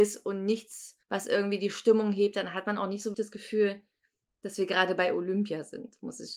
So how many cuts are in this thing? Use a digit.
2